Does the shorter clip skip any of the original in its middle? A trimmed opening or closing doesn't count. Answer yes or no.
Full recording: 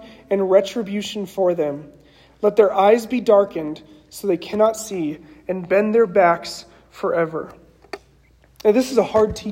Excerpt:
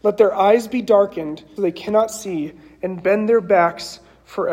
yes